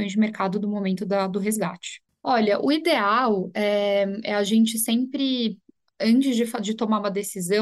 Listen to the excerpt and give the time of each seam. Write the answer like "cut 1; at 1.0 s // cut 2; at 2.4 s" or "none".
cut 1; at 2.1 s